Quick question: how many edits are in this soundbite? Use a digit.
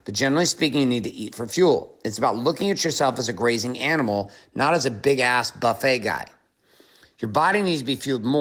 0